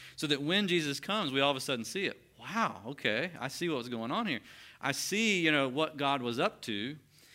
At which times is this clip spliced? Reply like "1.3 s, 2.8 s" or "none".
none